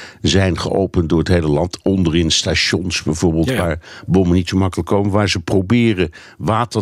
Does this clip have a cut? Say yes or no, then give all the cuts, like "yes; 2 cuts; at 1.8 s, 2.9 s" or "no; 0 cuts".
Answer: no; 0 cuts